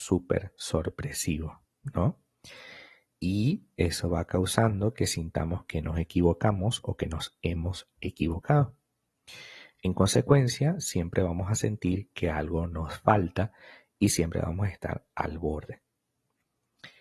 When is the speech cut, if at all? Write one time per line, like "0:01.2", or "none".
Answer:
none